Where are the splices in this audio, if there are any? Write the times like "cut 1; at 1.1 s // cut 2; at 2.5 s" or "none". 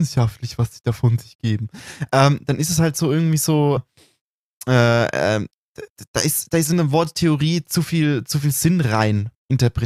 cut 1; at 3.8 s